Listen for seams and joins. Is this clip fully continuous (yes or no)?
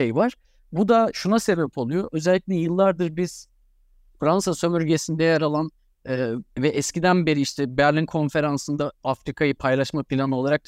yes